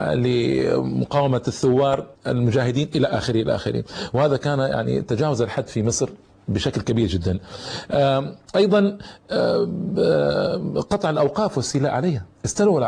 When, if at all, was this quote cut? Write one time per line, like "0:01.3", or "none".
0:02.2